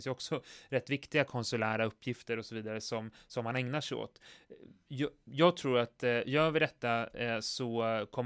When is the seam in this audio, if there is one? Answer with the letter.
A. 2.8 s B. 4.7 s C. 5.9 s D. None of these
D